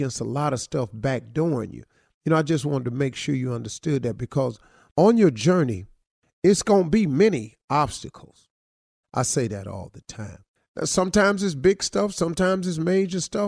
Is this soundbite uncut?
no; 2 cuts; at 9.0 s, 10.6 s

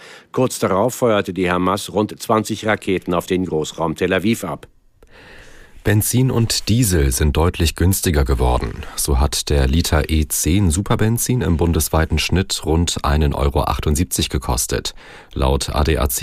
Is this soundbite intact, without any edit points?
yes; 0 cuts

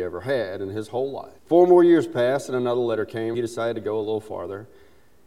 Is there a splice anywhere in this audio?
yes; 2 cuts; at 1.4 s, 3.3 s

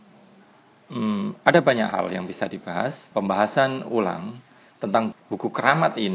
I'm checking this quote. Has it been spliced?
yes; 2 cuts; at 3.1 s, 5.1 s

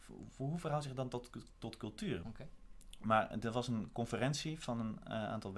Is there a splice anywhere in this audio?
yes; 1 cut; at 2.2 s

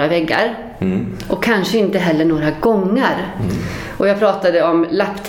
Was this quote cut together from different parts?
no; 0 cuts

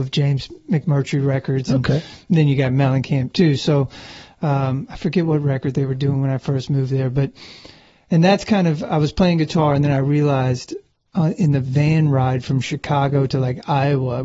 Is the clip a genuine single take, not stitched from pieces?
yes; 0 cuts

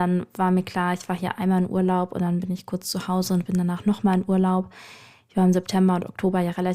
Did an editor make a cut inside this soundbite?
no; 0 cuts

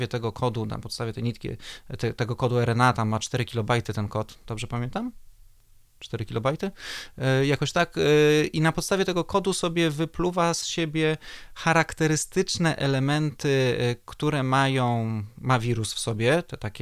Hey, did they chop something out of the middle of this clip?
no; 0 cuts

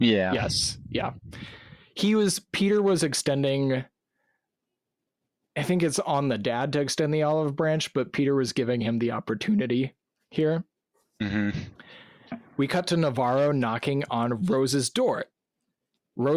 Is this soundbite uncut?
yes; 0 cuts

